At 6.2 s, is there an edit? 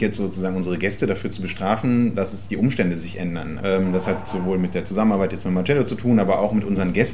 no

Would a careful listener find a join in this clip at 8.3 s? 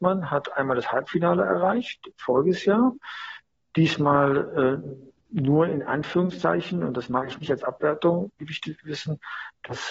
yes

